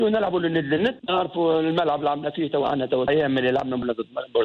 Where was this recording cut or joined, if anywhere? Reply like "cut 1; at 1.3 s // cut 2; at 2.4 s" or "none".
cut 1; at 2.6 s